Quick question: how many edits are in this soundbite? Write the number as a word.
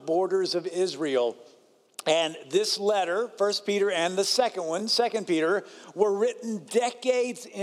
zero